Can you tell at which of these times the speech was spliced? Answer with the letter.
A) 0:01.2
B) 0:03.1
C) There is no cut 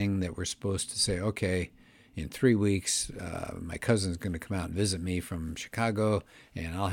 C